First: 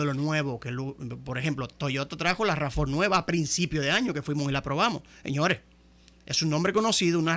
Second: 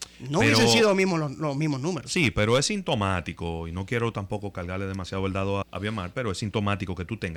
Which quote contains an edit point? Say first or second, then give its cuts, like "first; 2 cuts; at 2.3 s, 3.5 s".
second; 1 cut; at 5.6 s